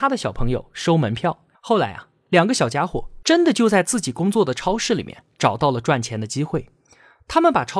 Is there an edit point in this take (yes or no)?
yes